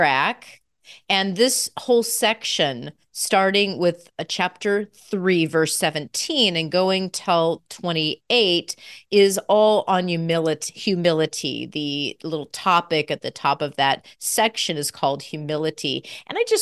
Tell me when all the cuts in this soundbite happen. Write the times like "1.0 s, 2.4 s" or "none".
none